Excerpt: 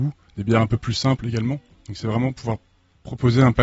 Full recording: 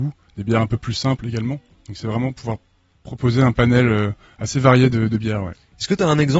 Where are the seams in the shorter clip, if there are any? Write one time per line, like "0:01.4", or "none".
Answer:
none

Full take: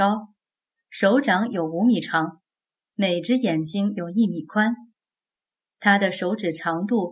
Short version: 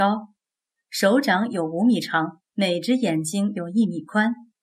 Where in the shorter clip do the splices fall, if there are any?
0:02.5

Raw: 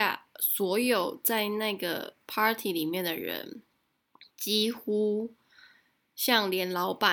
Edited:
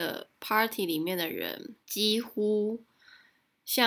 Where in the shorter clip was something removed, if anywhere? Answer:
0:01.8

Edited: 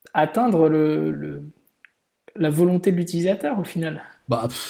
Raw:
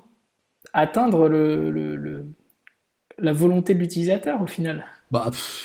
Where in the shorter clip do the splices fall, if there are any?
0:01.1

